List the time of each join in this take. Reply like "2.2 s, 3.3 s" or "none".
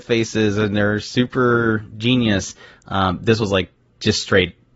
none